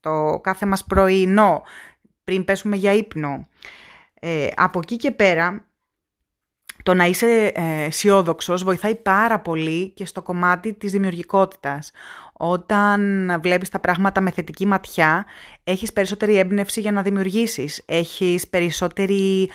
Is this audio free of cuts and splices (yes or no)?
yes